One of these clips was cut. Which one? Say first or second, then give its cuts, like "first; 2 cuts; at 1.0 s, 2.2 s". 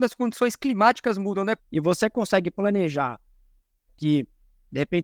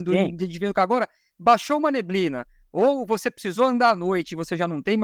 first; 2 cuts; at 1.6 s, 3.9 s